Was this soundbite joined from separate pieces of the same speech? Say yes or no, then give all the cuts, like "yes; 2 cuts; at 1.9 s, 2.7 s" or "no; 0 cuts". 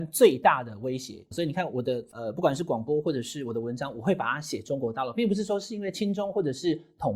yes; 1 cut; at 1.3 s